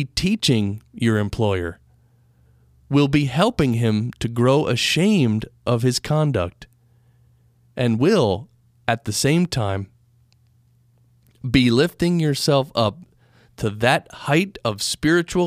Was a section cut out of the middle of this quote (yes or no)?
no